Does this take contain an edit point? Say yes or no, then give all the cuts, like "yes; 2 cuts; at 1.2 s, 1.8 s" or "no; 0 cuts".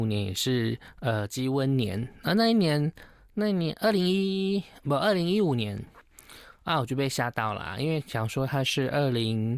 no; 0 cuts